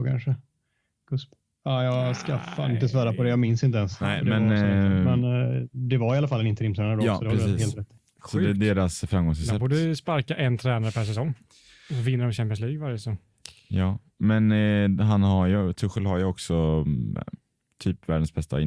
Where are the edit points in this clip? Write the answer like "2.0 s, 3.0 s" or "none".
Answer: none